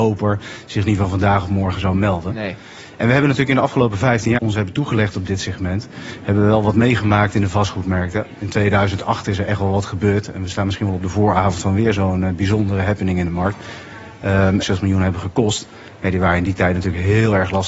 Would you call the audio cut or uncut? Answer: cut